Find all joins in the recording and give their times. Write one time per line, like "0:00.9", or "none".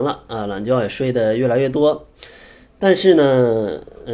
none

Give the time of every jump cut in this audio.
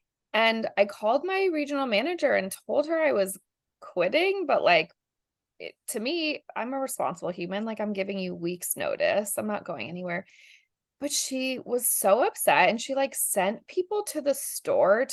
none

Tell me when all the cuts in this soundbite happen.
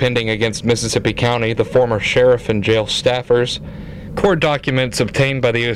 0:04.1

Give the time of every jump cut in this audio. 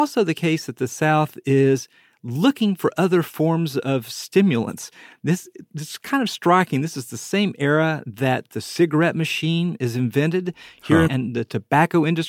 0:11.1

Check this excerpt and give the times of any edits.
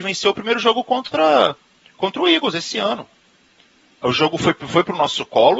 none

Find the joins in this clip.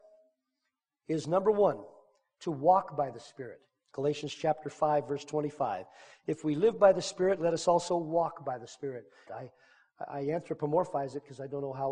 0:09.3

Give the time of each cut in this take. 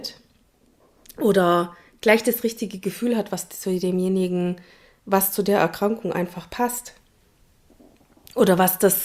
none

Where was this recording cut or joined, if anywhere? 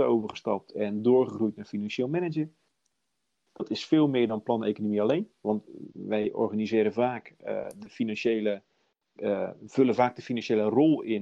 none

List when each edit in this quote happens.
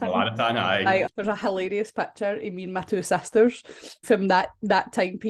0:01.1
0:04.0

